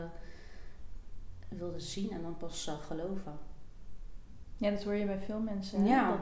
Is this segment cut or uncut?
uncut